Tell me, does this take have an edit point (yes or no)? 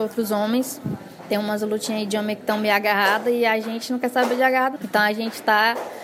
yes